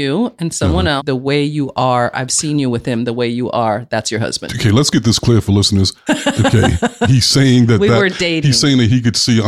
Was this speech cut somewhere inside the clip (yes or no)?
yes